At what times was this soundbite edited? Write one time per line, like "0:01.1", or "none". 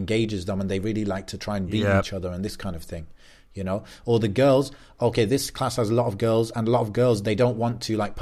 none